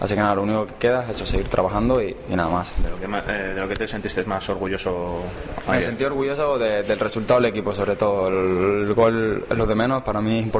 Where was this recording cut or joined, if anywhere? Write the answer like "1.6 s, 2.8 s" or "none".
none